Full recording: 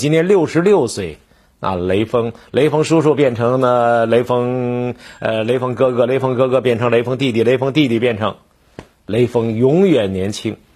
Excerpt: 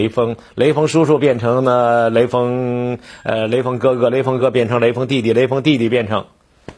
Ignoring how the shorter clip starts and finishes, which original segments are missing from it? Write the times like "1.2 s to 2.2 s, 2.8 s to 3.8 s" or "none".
6.3 s to 6.5 s